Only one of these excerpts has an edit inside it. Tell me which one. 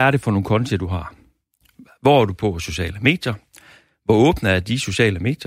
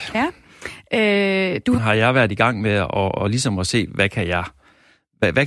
second; 1 cut; at 1.8 s

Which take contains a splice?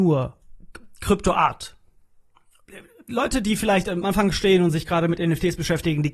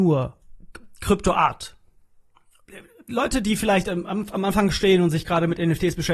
first; 1 cut; at 4.0 s

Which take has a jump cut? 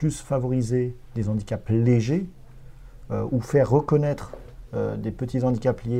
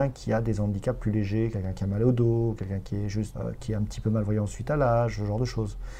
second; 1 cut; at 3.3 s

